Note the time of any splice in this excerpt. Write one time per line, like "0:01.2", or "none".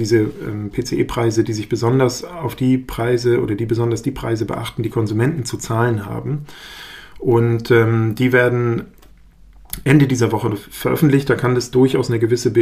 none